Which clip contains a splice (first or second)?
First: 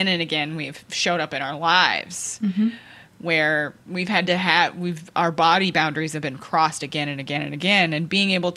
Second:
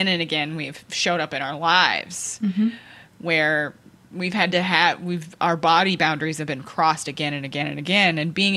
first